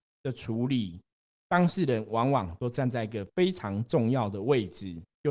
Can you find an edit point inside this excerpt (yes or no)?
no